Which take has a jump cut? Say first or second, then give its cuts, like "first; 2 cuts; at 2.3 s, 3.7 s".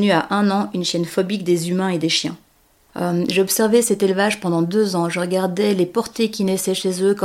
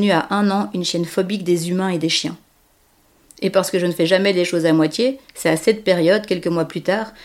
first; 1 cut; at 2.9 s